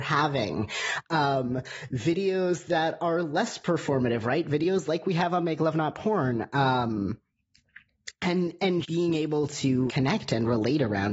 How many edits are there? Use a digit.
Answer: 2